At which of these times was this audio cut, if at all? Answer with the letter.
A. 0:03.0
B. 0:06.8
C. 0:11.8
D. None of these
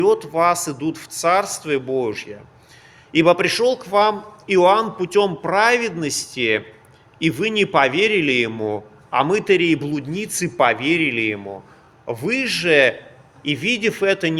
D